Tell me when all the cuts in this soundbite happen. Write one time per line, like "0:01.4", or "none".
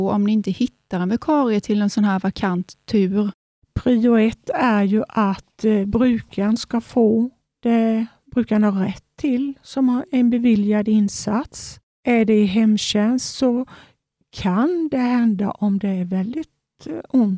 none